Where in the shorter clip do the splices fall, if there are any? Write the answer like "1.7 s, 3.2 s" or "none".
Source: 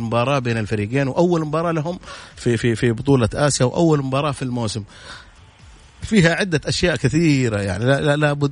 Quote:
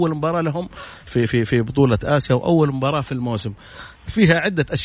4.0 s